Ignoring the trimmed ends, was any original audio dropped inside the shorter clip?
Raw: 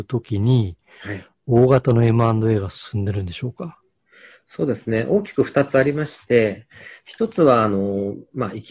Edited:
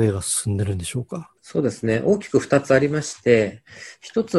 yes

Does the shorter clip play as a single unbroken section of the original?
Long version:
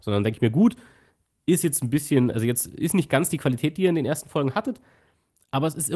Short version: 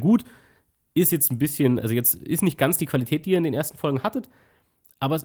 yes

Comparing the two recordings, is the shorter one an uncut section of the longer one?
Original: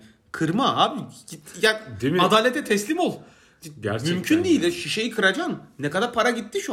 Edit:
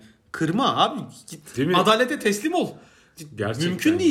no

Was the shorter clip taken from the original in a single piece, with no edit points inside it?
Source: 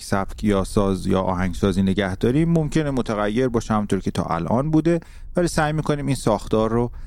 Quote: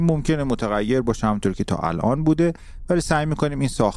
yes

